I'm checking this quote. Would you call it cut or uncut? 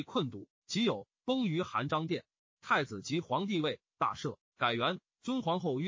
cut